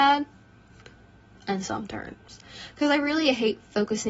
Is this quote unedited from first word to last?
no; 1 cut; at 1.4 s

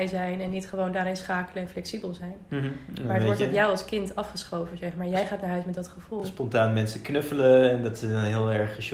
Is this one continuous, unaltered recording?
yes; 0 cuts

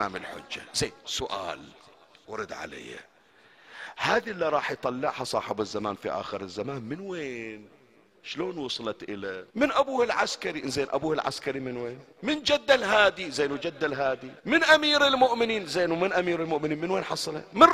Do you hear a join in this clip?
yes; 3 cuts; at 9.5 s, 12.1 s, 14.4 s

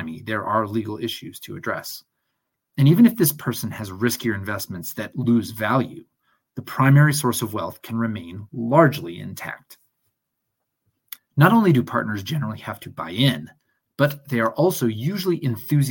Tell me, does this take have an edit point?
yes; 1 cut; at 11.2 s

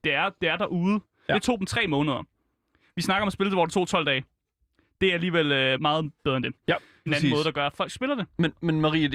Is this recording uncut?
no; 3 cuts; at 1.3 s, 5.8 s, 7.1 s

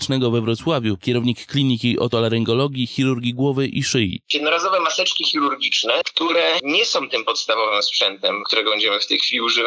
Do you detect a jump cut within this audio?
yes; 1 cut; at 1.0 s

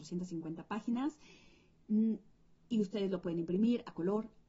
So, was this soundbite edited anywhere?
no; 0 cuts

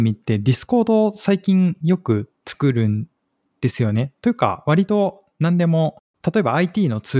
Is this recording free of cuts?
yes; 0 cuts

